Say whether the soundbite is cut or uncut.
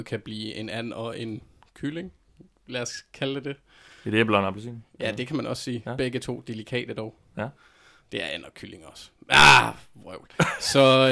uncut